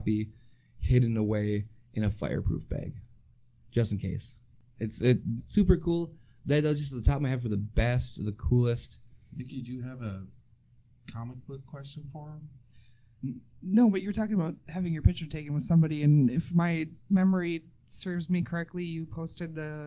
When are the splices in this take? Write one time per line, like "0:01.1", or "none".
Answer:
0:05.4